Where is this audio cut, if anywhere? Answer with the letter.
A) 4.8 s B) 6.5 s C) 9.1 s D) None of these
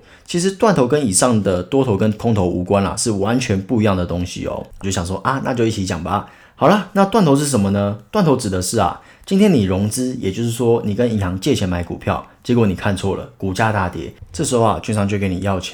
A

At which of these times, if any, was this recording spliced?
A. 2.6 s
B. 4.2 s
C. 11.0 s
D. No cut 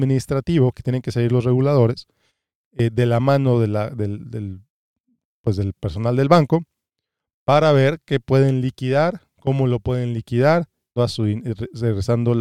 C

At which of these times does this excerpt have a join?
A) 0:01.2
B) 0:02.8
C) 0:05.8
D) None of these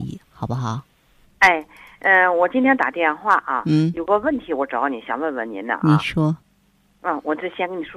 A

